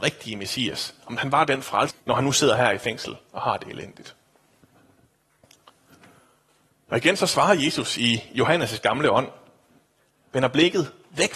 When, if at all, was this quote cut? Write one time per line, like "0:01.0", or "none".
0:01.9